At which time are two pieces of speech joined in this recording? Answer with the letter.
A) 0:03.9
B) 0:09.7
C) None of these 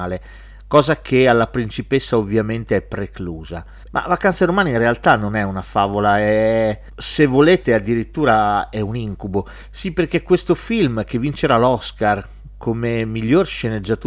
A